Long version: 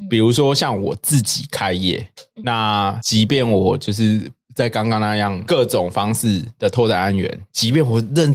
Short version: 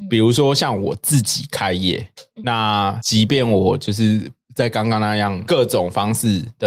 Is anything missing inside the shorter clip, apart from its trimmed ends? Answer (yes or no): no